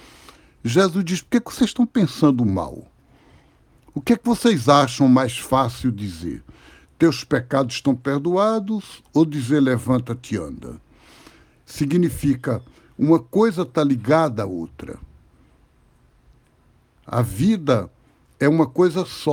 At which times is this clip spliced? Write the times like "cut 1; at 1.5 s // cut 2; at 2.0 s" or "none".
none